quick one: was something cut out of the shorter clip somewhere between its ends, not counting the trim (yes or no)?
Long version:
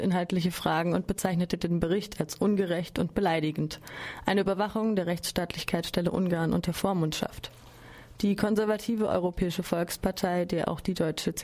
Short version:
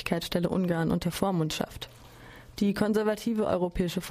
no